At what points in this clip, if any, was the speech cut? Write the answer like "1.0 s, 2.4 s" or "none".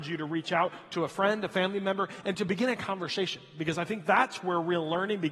none